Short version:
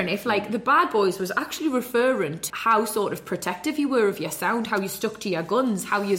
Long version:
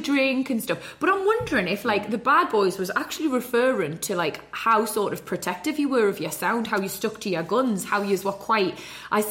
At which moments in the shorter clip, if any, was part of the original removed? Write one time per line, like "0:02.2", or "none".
0:02.5